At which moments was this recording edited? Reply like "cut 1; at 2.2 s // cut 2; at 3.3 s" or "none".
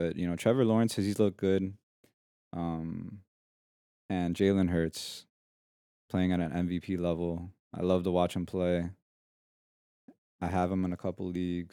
none